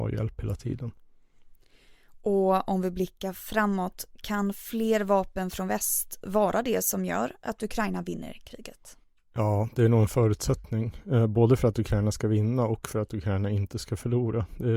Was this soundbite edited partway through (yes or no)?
no